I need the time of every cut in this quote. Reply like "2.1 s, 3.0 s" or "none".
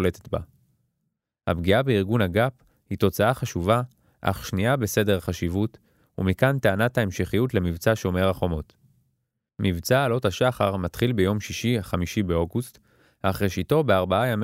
none